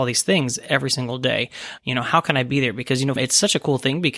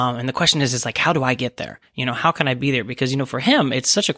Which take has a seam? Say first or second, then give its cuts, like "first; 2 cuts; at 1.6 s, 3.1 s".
first; 2 cuts; at 1.8 s, 3.2 s